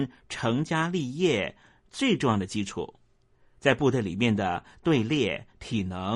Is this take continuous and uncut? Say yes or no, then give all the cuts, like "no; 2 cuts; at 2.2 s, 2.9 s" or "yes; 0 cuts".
yes; 0 cuts